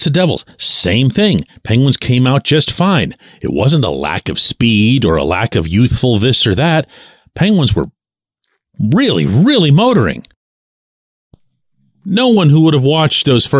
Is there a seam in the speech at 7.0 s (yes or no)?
no